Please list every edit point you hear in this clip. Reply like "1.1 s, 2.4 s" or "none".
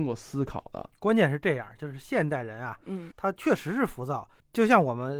0.9 s, 3.1 s